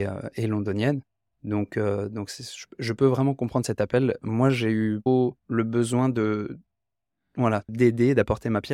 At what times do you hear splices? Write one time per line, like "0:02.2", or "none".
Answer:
0:05.4
0:07.7